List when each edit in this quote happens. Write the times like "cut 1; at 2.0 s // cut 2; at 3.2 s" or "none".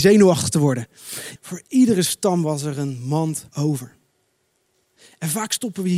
cut 1; at 1.4 s // cut 2; at 3.5 s